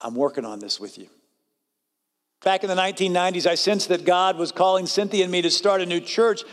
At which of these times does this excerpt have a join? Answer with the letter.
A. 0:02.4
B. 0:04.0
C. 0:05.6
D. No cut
A